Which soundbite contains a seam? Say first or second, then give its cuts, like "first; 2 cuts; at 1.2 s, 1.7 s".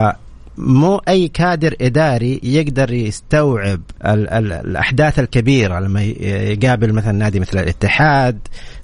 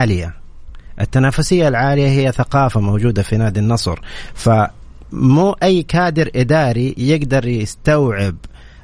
first; 1 cut; at 4.0 s